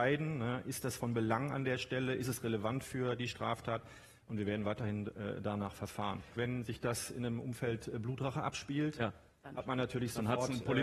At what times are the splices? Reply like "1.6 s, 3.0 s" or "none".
6.4 s